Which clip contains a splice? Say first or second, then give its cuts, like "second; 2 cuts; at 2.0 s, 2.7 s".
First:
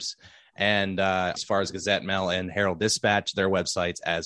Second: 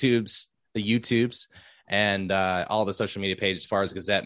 first; 1 cut; at 1.4 s